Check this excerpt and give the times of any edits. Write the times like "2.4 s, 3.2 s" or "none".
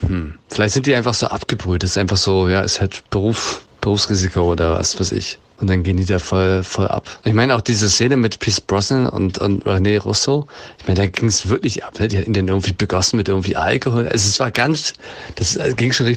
none